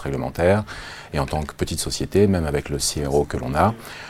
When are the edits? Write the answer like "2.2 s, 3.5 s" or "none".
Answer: none

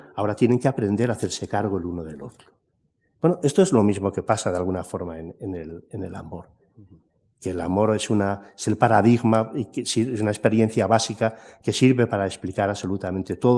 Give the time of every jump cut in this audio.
none

